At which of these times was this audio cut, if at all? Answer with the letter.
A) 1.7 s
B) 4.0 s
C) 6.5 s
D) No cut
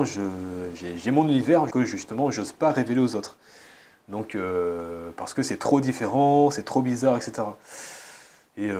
A